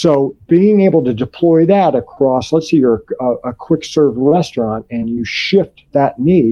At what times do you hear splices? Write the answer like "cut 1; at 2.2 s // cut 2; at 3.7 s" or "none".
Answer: none